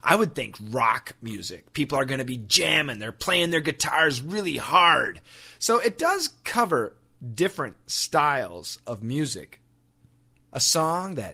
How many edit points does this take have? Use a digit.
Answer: 1